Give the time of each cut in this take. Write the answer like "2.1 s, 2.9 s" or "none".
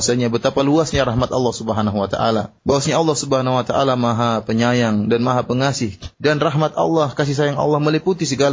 2.6 s, 6.1 s